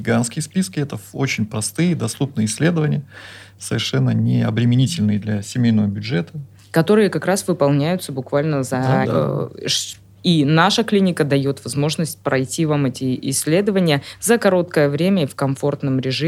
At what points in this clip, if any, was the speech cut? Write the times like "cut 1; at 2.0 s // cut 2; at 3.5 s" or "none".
cut 1; at 9.0 s